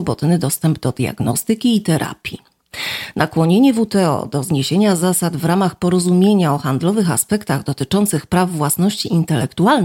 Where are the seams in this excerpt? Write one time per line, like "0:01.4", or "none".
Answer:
none